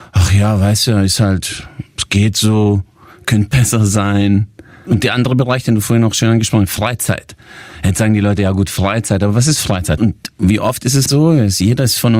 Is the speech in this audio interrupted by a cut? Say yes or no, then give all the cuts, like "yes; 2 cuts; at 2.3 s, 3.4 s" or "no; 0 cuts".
yes; 3 cuts; at 4.9 s, 10.0 s, 11.1 s